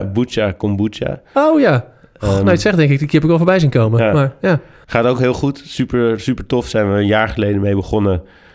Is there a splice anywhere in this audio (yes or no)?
no